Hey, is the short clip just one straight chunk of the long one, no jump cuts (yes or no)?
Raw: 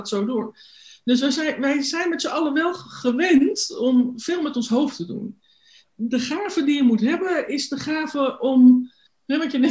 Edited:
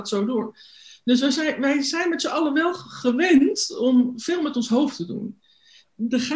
yes